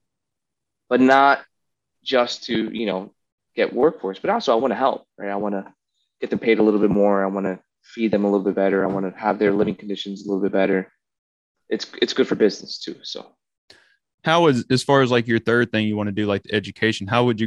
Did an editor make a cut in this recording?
no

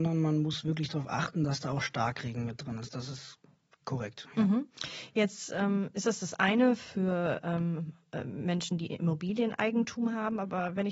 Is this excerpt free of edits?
yes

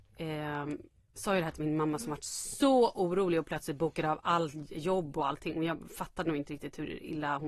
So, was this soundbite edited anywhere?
no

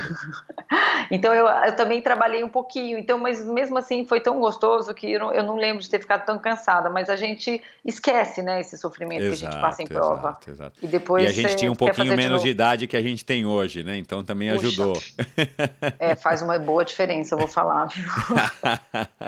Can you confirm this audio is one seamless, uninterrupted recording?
yes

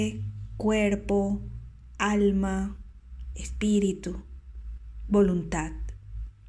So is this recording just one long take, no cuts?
yes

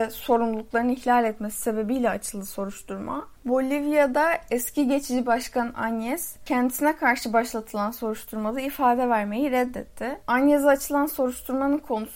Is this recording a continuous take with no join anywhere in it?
no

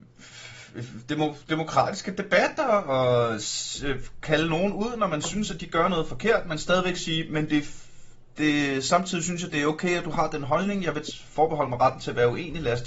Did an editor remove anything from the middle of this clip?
no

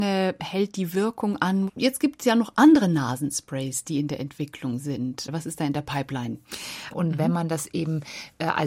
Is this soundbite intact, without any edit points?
no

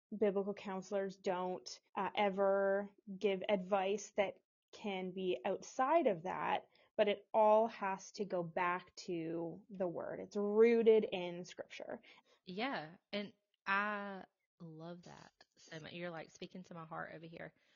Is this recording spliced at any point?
yes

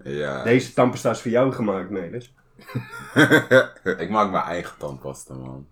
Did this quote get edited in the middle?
yes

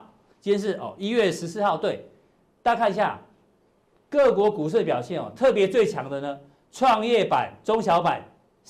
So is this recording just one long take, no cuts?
yes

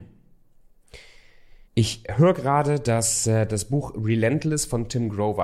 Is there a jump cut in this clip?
yes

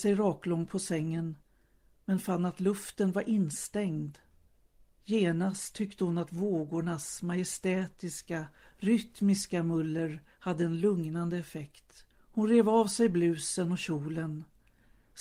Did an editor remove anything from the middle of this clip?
yes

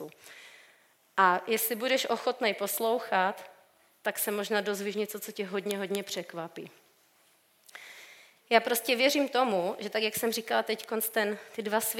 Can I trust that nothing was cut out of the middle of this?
yes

